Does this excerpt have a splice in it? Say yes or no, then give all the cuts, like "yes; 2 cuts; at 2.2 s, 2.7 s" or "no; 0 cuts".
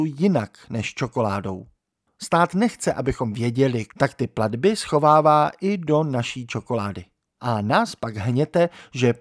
yes; 2 cuts; at 2.1 s, 3.9 s